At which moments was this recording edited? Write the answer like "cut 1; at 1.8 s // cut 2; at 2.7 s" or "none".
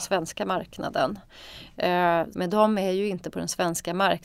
cut 1; at 2.3 s